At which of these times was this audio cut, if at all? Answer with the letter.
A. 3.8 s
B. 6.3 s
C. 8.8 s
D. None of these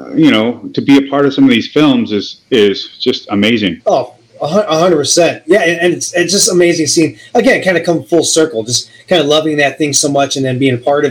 A